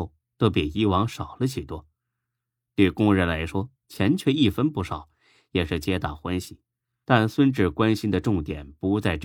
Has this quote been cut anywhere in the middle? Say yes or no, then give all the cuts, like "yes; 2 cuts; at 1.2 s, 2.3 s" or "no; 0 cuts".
yes; 2 cuts; at 3.8 s, 7.0 s